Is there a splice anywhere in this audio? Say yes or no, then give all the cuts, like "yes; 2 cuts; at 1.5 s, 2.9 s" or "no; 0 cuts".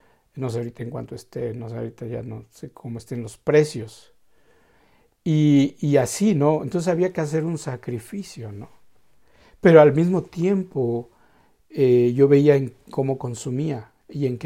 no; 0 cuts